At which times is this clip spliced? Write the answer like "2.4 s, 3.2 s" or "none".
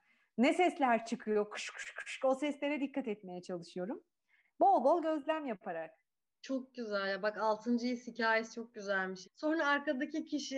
1.7 s, 9.2 s

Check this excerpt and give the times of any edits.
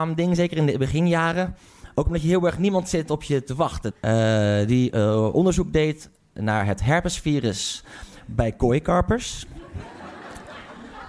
3.9 s

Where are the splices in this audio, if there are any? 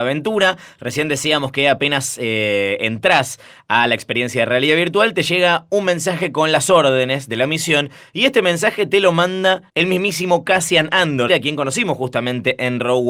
9.7 s, 11.3 s

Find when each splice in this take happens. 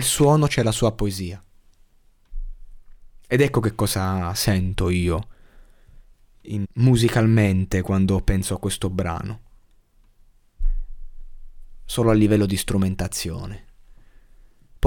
6.6 s

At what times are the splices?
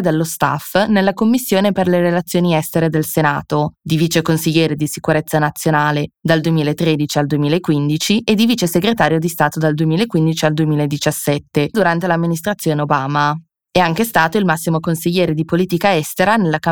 11.7 s

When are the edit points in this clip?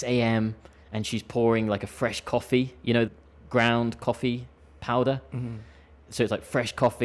3.1 s

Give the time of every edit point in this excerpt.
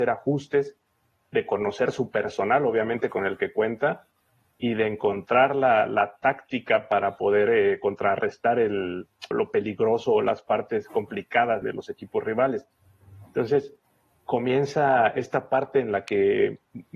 9.3 s, 11.6 s

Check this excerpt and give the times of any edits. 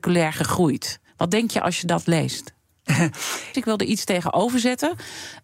1.1 s, 3.5 s

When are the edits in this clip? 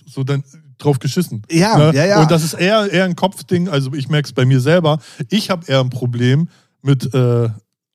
none

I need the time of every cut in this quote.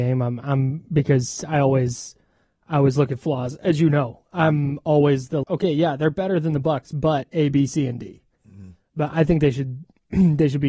5.4 s

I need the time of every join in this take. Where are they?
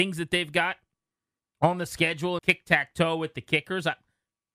2.4 s

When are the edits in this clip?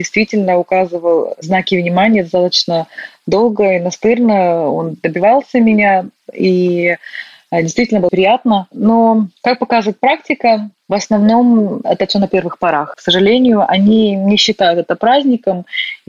8.1 s, 12.9 s

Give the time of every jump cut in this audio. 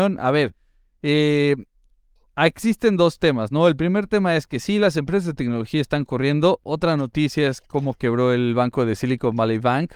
none

